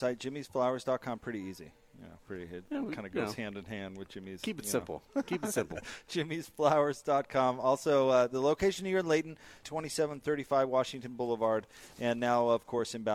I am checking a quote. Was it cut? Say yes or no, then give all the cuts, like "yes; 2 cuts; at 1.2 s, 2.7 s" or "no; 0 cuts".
yes; 1 cut; at 9.6 s